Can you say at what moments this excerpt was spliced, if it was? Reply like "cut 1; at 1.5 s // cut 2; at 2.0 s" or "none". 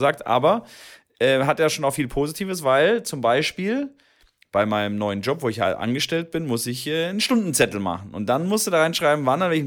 none